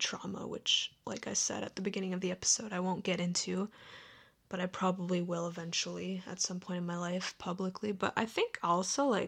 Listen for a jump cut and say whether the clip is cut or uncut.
cut